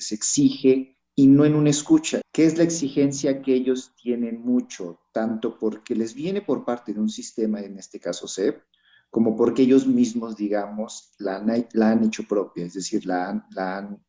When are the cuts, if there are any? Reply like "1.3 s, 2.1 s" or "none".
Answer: 2.2 s